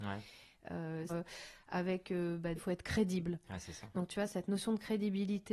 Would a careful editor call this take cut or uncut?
cut